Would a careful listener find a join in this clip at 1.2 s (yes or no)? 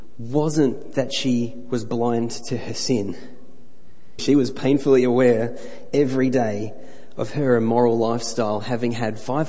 no